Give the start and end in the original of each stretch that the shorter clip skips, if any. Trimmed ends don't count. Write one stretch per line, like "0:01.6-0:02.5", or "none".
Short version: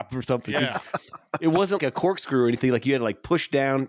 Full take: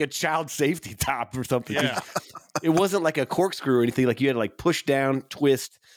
0:03.0-0:03.1